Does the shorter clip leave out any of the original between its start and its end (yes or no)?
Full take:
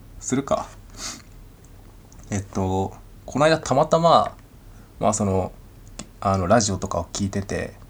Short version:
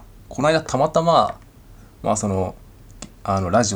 no